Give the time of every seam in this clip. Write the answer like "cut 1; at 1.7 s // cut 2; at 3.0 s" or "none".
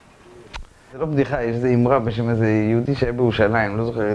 cut 1; at 0.9 s